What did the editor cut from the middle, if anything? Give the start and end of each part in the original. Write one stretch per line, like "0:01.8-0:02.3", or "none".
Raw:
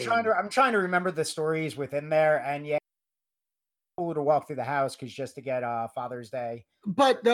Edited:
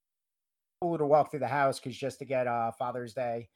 none